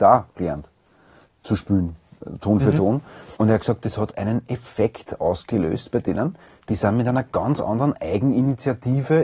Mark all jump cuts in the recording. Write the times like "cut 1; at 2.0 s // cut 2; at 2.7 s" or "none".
cut 1; at 3.3 s